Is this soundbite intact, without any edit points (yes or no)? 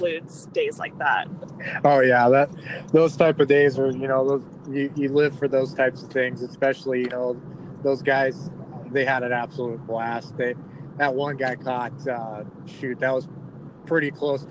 yes